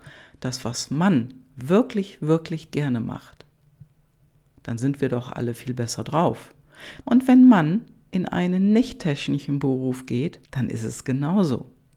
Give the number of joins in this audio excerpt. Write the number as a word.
two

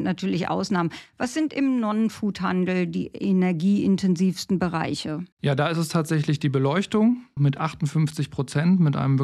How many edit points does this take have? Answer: two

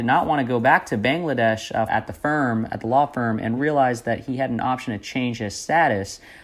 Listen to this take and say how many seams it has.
two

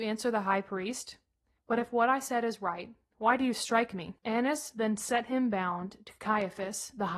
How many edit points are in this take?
two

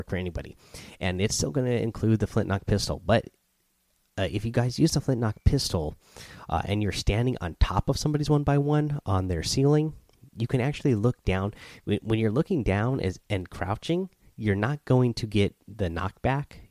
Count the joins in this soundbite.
zero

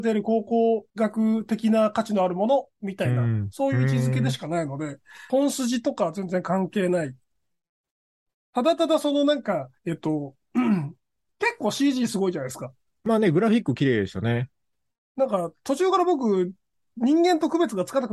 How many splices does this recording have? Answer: three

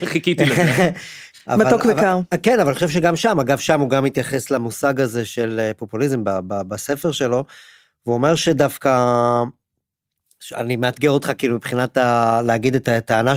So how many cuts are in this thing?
one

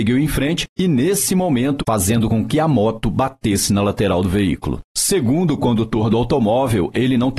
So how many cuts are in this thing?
one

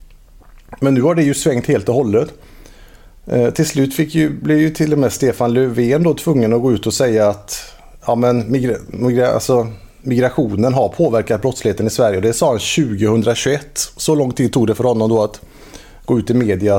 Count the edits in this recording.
zero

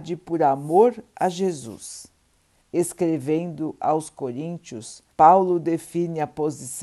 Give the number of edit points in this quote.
two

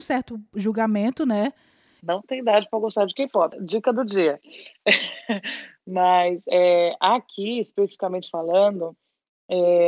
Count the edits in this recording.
one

